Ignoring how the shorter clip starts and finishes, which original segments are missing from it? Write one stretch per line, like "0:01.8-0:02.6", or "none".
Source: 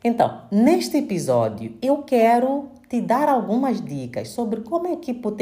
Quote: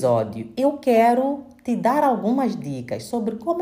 none